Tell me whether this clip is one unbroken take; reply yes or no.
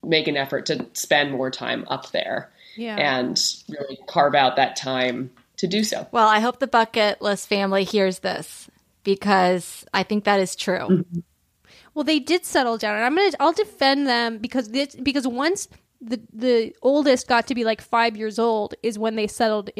yes